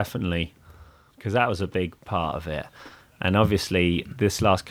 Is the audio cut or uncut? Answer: cut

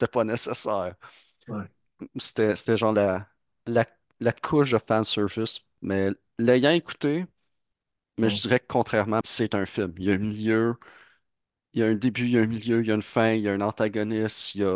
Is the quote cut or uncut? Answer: cut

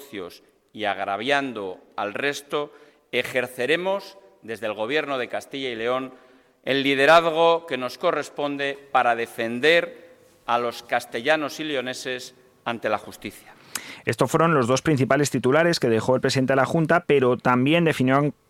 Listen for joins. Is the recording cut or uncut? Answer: uncut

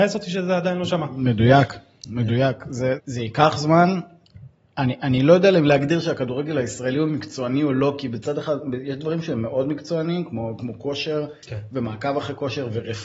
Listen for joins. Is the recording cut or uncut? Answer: cut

